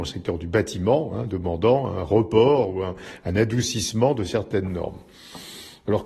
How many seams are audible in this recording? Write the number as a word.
zero